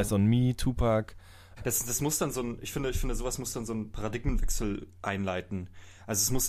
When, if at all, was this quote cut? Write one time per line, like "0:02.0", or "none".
0:01.6